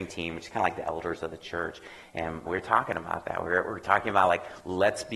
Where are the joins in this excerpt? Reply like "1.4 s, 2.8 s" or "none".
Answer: 2.5 s